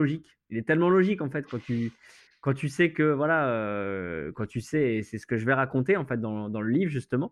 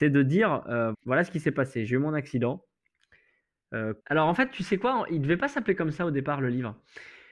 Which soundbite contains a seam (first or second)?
second